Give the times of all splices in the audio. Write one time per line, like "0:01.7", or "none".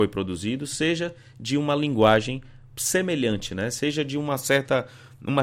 none